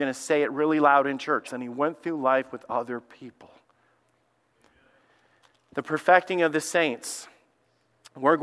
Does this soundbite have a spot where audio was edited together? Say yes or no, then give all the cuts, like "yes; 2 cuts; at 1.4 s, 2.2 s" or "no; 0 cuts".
yes; 1 cut; at 1.4 s